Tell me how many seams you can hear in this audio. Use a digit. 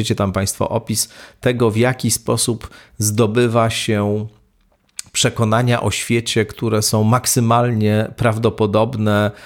0